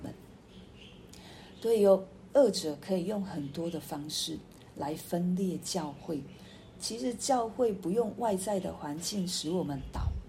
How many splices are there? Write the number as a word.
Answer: zero